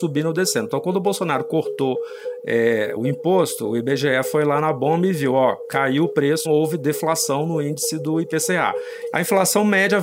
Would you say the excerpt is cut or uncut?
cut